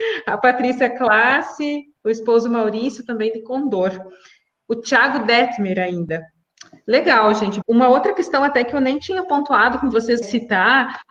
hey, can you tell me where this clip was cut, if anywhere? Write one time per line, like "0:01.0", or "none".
0:07.6
0:10.2